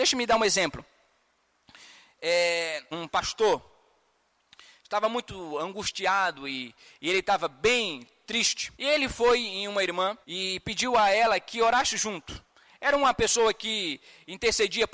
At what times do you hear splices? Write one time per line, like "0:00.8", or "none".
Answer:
0:02.9
0:08.7
0:10.2